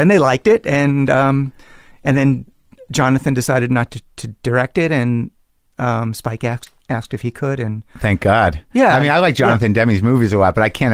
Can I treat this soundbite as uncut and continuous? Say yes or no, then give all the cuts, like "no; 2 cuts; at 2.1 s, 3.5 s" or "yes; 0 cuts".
yes; 0 cuts